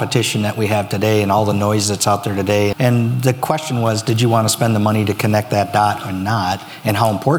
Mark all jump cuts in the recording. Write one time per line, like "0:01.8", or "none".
0:02.7